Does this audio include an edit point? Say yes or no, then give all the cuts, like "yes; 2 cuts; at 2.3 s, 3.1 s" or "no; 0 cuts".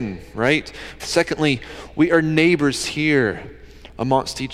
yes; 1 cut; at 1.0 s